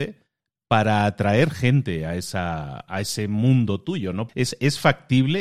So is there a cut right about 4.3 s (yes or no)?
yes